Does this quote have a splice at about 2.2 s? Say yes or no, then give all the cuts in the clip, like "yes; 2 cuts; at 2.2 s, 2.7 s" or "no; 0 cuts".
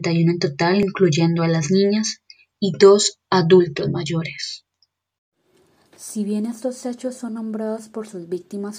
no; 0 cuts